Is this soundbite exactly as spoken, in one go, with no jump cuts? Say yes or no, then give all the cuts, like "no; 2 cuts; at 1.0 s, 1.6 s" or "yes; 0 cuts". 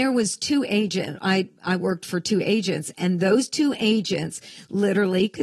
yes; 0 cuts